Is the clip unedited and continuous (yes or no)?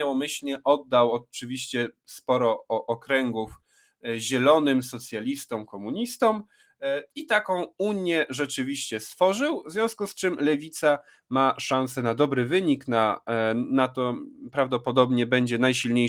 yes